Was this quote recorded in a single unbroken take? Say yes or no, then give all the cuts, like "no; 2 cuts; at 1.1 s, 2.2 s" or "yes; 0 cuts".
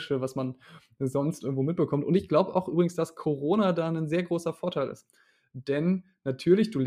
yes; 0 cuts